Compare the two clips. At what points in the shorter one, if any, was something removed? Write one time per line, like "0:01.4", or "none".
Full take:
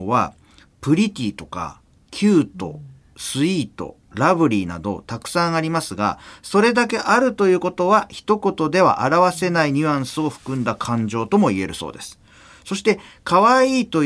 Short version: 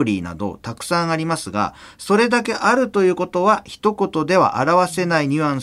none